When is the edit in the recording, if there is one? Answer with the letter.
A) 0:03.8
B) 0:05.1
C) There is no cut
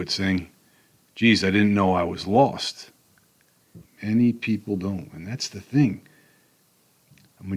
A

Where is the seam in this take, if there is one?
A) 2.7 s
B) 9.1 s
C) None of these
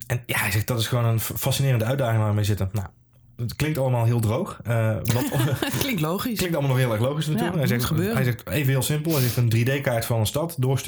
C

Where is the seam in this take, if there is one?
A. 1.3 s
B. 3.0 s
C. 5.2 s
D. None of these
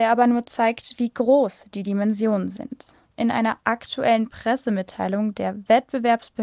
B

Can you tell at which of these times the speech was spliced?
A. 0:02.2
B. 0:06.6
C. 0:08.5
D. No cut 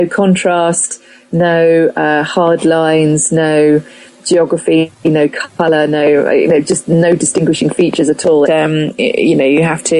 C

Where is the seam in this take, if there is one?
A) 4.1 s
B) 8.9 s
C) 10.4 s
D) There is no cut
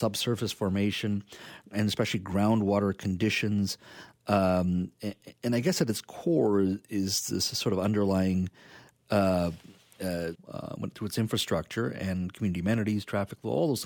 C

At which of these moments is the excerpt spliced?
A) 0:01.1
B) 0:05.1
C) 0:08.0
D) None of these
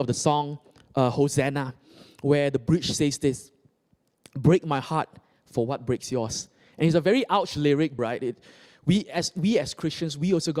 C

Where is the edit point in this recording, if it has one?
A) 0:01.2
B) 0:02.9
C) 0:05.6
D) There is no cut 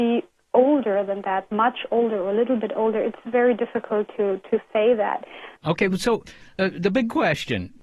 D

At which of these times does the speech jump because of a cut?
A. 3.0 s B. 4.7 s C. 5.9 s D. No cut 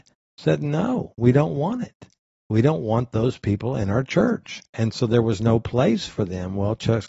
B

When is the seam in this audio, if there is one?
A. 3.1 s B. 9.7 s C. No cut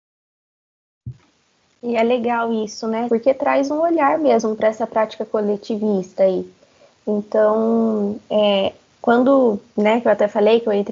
A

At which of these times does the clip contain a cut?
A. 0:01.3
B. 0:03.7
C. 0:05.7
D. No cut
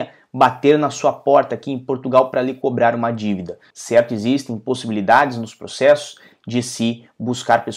B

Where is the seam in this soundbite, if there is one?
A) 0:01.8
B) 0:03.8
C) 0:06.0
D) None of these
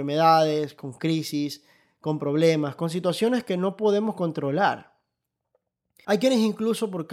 C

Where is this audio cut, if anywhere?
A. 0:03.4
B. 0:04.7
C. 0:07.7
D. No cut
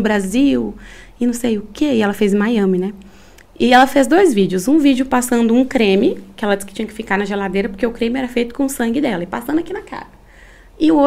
D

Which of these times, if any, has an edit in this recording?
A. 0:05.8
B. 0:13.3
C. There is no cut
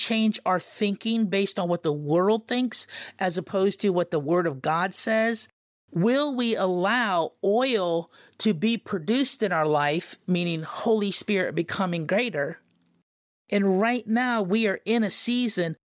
B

